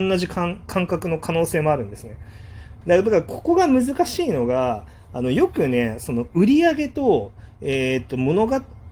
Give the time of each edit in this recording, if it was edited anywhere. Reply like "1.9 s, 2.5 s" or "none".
2.8 s